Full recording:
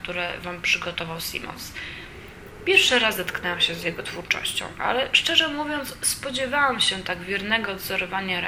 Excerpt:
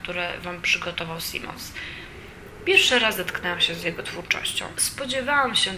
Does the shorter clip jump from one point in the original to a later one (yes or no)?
yes